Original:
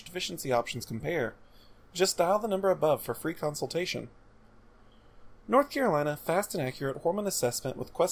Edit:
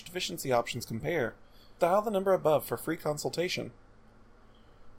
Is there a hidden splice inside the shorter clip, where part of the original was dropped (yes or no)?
yes